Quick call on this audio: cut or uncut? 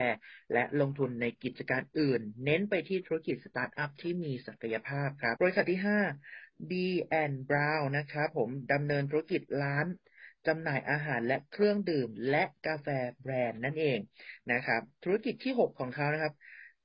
cut